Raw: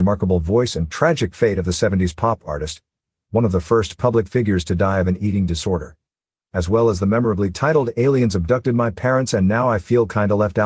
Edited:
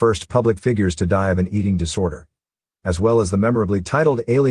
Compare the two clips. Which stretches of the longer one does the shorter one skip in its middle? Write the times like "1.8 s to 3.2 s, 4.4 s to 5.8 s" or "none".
none

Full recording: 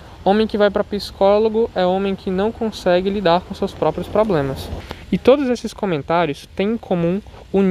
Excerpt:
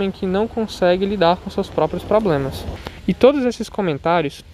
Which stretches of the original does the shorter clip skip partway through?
none

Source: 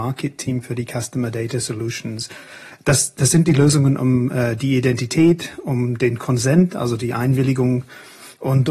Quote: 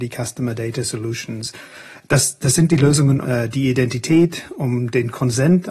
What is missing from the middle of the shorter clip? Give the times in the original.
4.0 s to 4.3 s

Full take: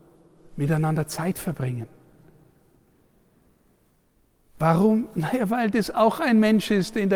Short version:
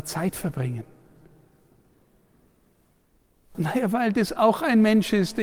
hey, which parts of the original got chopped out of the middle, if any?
4.6 s to 5.1 s

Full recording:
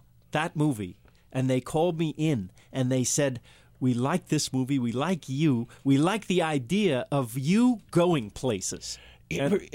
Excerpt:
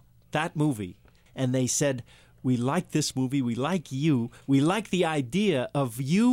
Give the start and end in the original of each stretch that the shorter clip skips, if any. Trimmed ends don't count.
1.3 s to 2.6 s

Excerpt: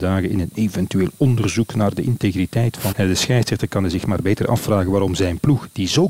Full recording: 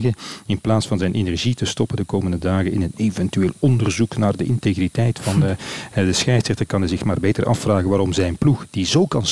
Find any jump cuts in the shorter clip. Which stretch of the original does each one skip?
5.3 s to 5.9 s

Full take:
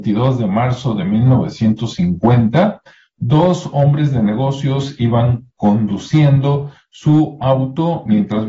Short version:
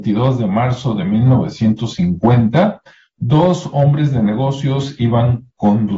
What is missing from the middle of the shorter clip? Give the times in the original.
none

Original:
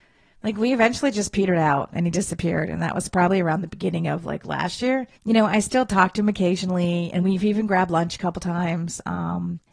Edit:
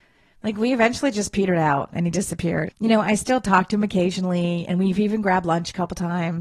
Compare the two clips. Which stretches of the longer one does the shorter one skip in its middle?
2.7 s to 5.1 s

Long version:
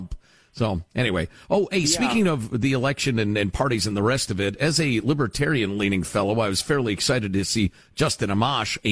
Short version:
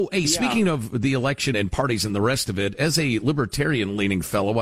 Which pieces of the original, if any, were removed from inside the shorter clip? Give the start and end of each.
3.1 s to 3.3 s

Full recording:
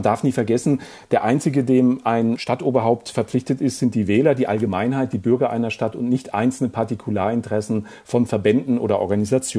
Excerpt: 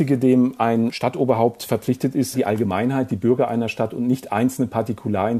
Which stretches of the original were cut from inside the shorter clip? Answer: 3.8 s to 4.3 s

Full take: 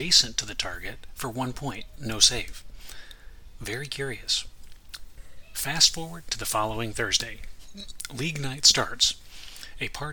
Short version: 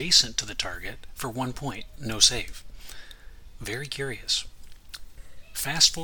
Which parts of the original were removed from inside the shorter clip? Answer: none

